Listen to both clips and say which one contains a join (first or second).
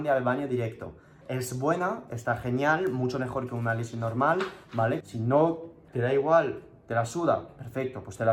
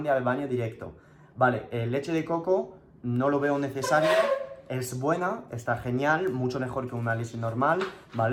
first